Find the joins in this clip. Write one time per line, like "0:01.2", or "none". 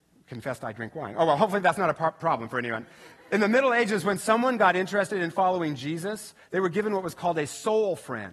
none